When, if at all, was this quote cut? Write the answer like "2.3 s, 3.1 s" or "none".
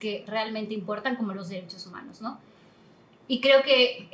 none